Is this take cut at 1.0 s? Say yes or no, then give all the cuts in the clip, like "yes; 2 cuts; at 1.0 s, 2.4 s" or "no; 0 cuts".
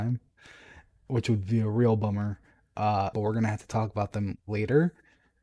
no; 1 cut; at 3.1 s